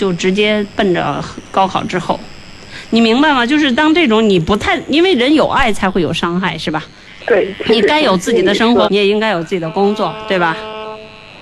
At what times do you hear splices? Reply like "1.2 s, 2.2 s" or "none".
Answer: 7.2 s, 8.8 s